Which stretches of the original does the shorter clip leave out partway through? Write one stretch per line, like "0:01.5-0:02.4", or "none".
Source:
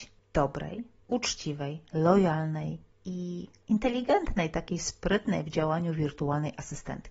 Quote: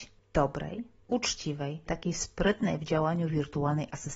0:01.9-0:04.5